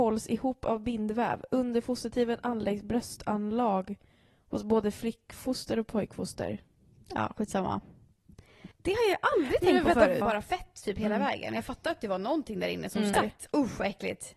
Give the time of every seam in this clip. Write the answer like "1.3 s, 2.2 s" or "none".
8.7 s, 10.2 s, 13.1 s